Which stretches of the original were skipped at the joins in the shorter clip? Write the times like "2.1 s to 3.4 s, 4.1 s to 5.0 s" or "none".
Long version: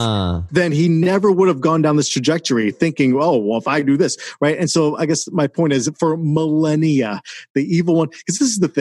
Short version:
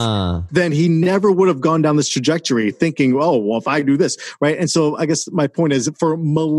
none